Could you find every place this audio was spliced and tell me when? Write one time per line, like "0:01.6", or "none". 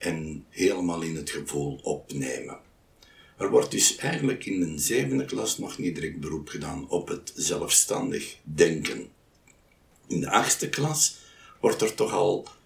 none